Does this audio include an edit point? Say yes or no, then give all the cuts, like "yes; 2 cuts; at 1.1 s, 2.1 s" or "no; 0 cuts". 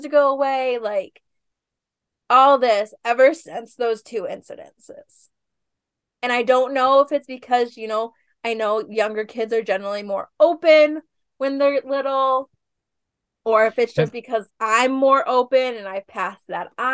yes; 1 cut; at 14.5 s